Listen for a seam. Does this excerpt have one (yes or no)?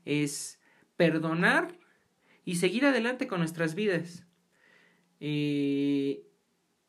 no